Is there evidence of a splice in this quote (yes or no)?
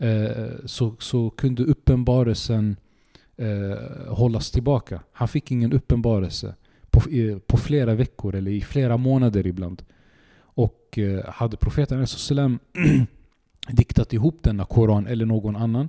no